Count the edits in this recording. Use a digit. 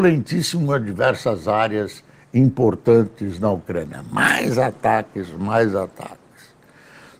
0